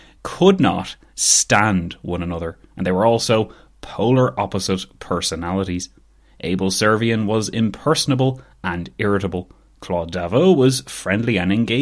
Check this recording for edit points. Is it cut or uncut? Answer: uncut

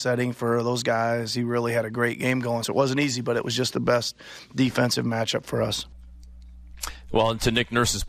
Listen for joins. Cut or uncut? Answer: uncut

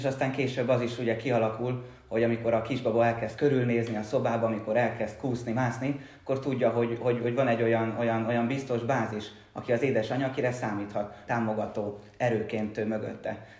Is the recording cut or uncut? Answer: cut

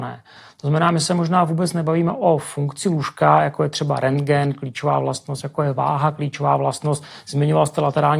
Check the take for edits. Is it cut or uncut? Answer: uncut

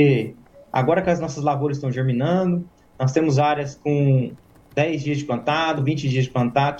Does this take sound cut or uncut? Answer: uncut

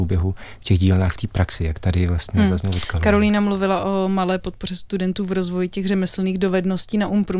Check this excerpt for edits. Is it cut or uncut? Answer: uncut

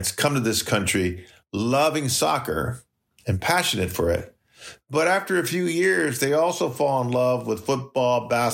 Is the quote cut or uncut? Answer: uncut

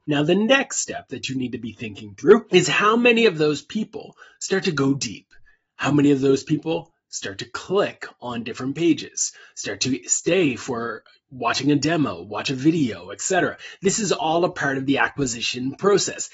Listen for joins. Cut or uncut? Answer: uncut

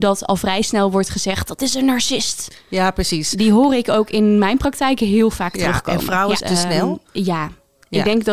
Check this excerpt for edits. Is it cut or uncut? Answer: cut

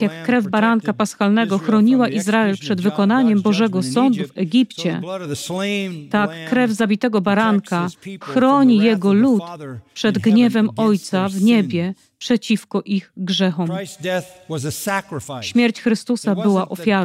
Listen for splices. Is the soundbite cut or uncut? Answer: uncut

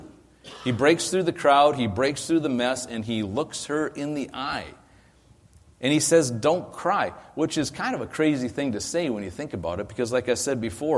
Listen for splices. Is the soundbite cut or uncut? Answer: uncut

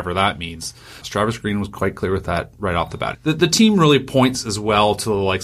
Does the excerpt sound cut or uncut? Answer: cut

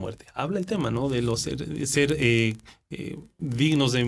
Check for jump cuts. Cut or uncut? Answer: uncut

